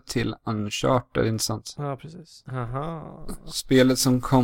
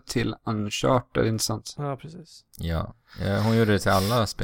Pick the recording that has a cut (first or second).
first